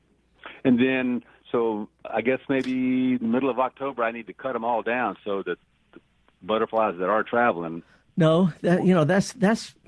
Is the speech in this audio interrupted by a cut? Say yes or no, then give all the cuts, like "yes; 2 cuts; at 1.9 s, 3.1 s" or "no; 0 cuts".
no; 0 cuts